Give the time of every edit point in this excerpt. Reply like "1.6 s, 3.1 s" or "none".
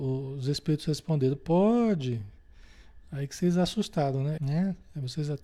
4.4 s